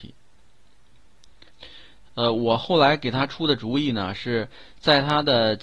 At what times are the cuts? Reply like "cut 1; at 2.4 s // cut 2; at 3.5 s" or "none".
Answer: cut 1; at 2.1 s